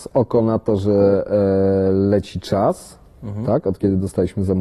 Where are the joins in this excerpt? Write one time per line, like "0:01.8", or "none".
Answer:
none

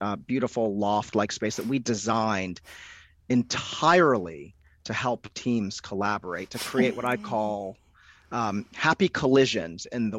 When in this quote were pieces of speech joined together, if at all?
none

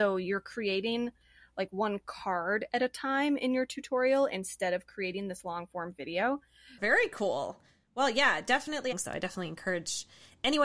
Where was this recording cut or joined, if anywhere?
0:06.8
0:08.9

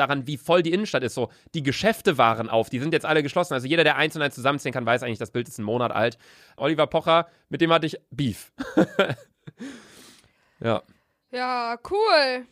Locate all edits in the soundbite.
0:06.6

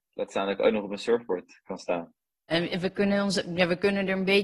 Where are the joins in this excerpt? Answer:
0:02.5

